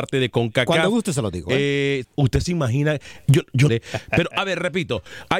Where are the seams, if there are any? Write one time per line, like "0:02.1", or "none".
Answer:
0:02.0
0:03.7